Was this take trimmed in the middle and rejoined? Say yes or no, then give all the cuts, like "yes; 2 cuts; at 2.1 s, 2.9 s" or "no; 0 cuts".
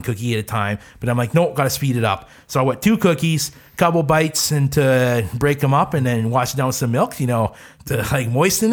no; 0 cuts